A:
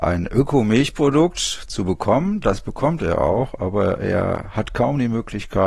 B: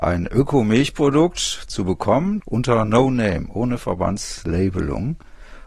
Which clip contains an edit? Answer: B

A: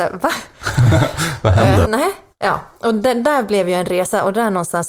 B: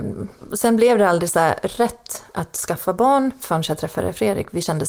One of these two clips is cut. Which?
A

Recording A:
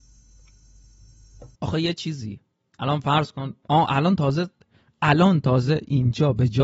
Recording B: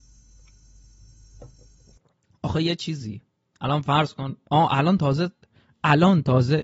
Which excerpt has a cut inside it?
A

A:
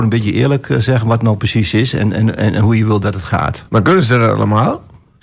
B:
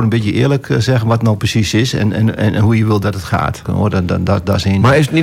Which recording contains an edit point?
B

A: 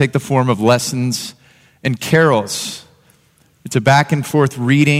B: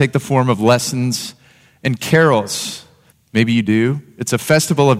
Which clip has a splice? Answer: B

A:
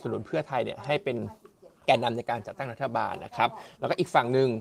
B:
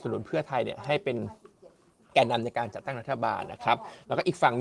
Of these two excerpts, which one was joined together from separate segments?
A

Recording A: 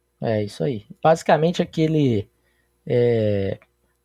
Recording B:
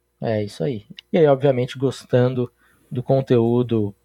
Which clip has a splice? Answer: B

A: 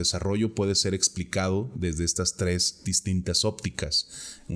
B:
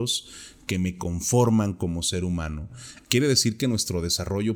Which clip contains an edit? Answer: B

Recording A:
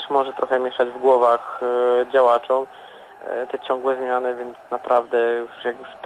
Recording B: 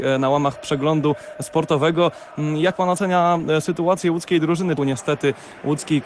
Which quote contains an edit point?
B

